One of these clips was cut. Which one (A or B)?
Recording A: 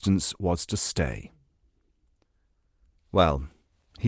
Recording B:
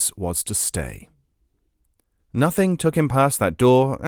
B